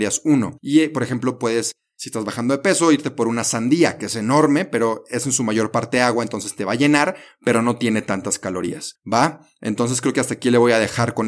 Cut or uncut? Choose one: uncut